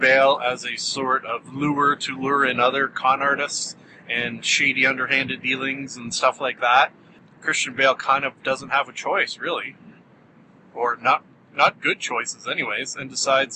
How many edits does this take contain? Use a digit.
0